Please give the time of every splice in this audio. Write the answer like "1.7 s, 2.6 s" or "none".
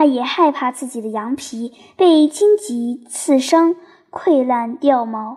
none